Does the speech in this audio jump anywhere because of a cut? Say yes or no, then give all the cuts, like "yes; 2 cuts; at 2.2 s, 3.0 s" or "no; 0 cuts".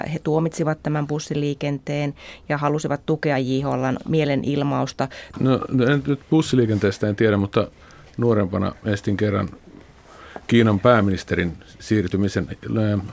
yes; 2 cuts; at 5.3 s, 8.8 s